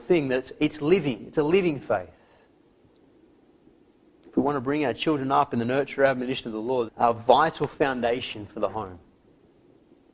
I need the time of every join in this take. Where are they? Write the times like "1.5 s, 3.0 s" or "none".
6.9 s